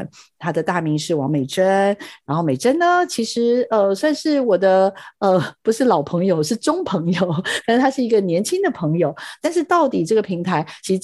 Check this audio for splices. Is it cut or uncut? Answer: cut